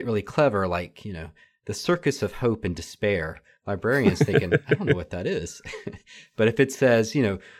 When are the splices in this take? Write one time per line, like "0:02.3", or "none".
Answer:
none